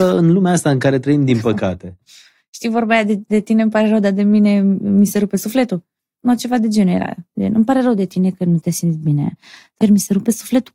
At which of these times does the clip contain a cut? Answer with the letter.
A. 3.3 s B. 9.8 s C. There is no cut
B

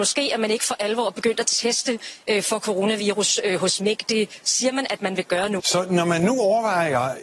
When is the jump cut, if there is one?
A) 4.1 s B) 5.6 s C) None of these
B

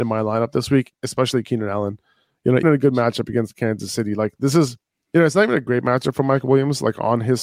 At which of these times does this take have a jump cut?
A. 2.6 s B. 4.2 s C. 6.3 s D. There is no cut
A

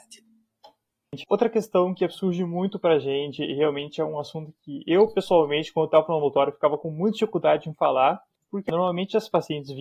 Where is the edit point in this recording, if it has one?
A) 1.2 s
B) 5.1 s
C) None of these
A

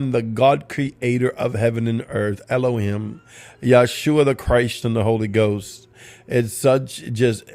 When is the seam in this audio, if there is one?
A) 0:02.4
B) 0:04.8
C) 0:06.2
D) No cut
B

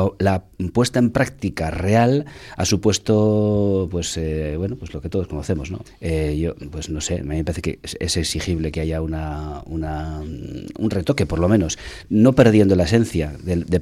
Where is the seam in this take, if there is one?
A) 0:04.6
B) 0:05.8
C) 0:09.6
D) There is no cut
B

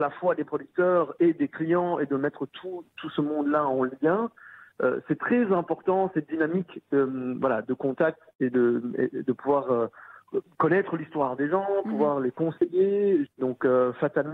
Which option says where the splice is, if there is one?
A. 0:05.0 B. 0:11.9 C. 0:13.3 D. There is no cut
C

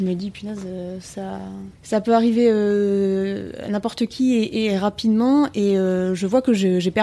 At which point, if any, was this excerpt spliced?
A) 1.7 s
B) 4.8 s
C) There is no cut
A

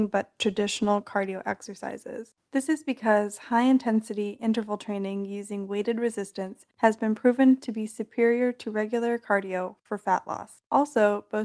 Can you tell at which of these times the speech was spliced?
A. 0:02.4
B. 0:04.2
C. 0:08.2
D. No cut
A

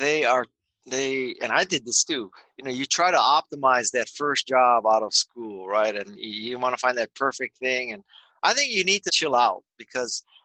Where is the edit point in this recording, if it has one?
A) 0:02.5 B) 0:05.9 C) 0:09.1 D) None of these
C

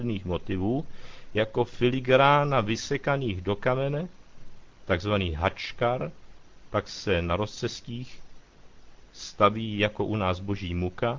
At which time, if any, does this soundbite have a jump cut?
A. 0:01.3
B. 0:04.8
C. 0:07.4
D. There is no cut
D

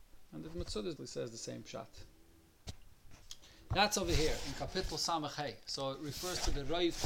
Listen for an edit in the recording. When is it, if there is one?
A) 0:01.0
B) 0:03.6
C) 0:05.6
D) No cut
A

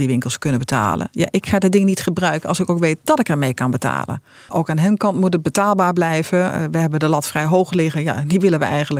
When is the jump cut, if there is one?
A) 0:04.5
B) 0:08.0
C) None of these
A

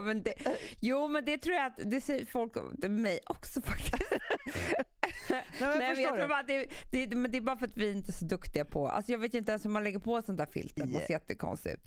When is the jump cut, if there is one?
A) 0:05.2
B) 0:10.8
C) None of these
B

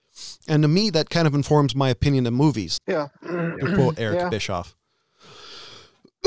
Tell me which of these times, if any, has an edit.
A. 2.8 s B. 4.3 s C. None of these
A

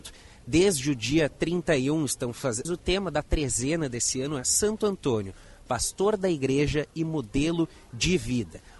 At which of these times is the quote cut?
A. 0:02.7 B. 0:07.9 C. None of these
A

